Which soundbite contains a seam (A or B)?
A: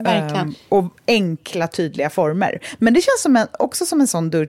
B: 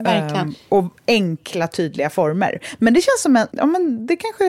B